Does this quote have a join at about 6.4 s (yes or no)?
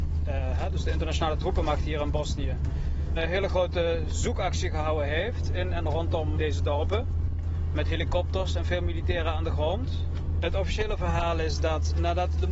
yes